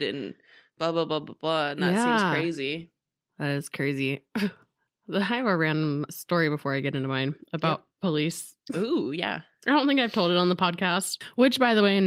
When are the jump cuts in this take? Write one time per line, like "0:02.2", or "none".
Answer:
0:06.1